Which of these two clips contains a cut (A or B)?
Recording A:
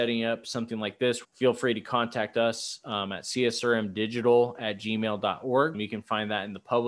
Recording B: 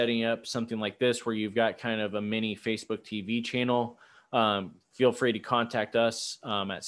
A